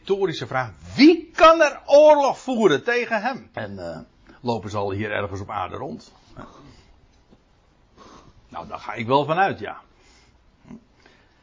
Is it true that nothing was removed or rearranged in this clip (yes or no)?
no